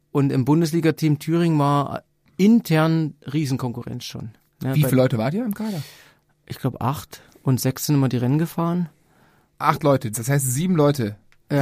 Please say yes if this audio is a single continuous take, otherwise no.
no